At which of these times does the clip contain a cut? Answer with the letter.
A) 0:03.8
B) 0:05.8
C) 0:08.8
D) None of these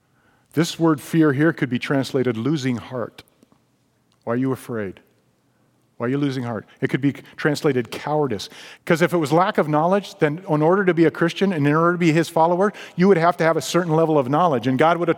C